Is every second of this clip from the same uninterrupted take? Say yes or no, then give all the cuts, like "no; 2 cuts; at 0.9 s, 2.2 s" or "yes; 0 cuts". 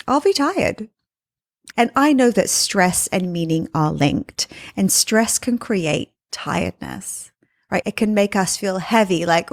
no; 2 cuts; at 1.7 s, 7.8 s